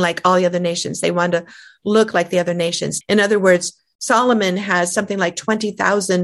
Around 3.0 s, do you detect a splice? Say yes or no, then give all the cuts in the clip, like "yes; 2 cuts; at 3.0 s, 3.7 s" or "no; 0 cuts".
yes; 1 cut; at 3.0 s